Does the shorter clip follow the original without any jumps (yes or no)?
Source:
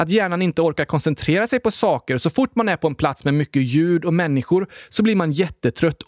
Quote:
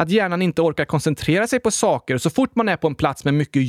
yes